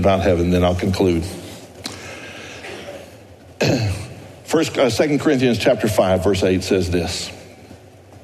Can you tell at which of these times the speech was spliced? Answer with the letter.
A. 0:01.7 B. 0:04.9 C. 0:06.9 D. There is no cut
D